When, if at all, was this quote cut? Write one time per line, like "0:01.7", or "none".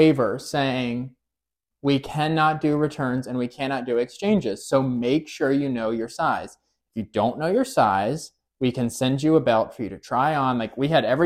0:01.7

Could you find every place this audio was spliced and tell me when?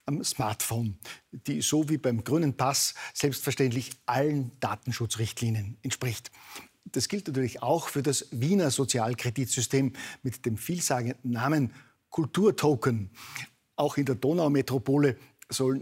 none

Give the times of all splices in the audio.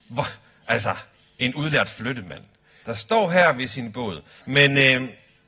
0:02.8
0:04.4

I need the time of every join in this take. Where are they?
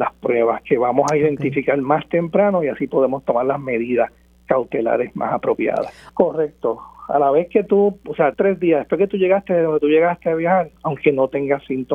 0:06.1
0:08.3
0:10.8

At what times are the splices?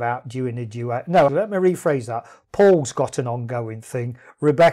0:01.3

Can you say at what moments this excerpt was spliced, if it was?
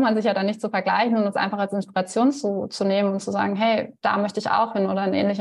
none

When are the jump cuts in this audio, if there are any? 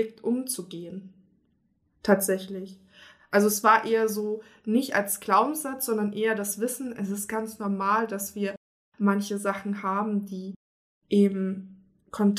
none

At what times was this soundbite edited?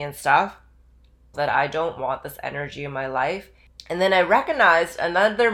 0:01.3

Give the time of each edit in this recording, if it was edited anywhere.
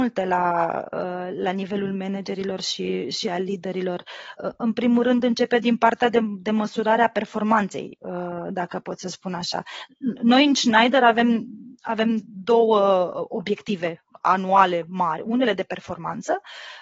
none

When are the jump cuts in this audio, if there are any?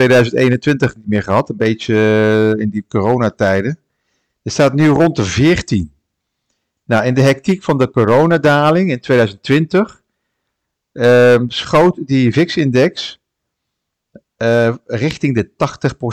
none

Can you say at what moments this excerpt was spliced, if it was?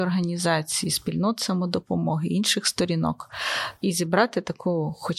0:03.8

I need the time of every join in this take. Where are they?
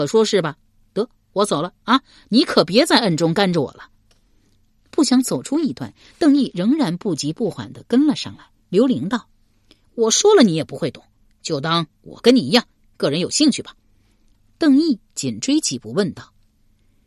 0:08.6

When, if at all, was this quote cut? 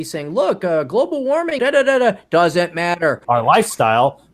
0:01.6
0:03.2

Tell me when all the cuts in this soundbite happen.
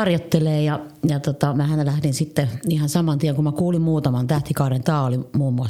none

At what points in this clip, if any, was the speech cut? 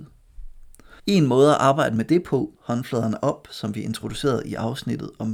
0:01.0
0:02.6

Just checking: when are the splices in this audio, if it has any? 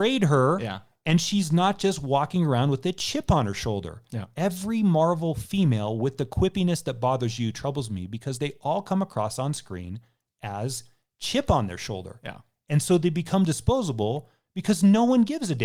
none

